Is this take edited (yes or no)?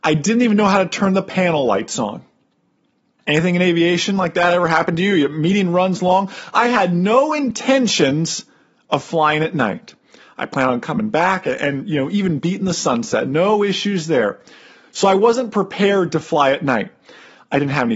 yes